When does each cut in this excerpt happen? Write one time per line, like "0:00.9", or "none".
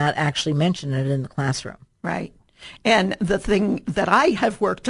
none